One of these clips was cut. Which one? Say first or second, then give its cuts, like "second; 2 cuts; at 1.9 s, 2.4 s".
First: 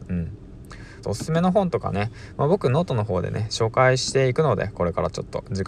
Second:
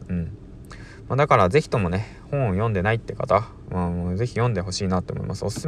first; 1 cut; at 1.0 s